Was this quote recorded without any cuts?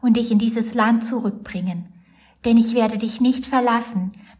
yes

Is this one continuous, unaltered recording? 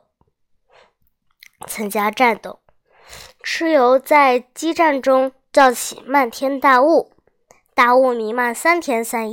yes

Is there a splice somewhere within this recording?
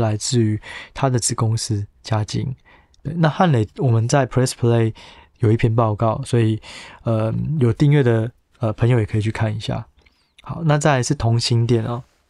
no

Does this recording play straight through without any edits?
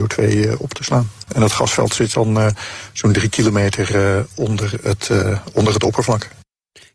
yes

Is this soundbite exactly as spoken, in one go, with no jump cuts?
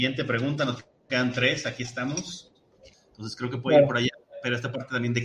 no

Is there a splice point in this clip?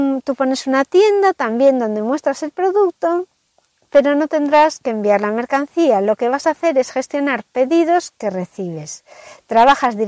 no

